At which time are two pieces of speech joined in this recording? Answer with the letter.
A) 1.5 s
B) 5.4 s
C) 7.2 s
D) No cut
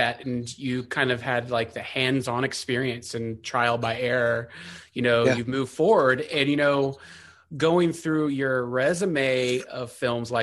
D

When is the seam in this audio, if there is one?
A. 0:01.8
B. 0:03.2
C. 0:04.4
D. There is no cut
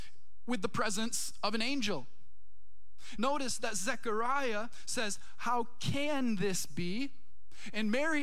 B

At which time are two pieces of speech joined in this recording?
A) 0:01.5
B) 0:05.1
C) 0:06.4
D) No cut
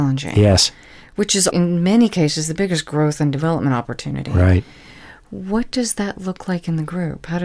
A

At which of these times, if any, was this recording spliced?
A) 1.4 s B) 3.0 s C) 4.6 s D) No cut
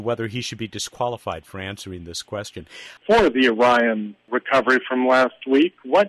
B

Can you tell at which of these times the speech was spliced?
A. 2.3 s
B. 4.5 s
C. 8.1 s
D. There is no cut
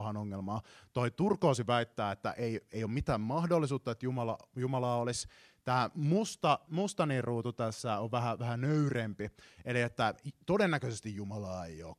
D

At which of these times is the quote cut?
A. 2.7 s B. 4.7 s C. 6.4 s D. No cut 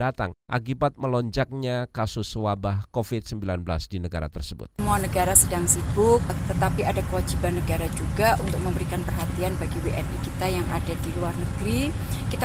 C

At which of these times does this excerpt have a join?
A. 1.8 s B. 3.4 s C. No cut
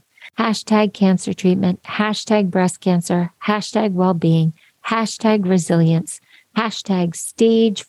C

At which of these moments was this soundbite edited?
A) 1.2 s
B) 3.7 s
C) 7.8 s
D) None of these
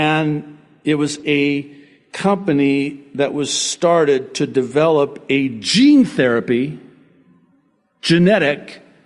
A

